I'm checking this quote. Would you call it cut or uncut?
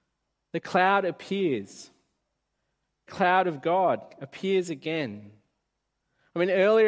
cut